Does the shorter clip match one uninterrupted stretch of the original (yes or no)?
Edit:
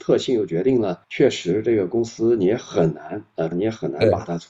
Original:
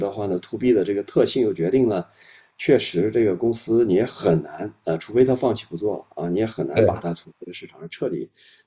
no